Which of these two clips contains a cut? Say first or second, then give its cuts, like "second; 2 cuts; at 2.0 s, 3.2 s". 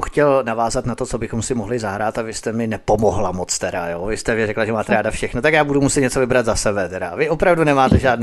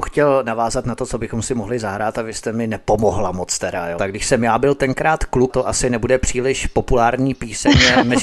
second; 2 cuts; at 4.0 s, 5.5 s